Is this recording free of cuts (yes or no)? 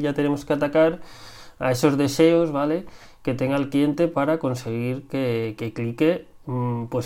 yes